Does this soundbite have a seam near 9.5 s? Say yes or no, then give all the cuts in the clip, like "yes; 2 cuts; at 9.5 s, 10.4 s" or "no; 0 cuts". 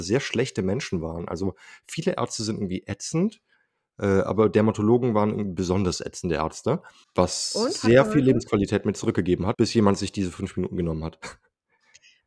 yes; 2 cuts; at 7.0 s, 9.5 s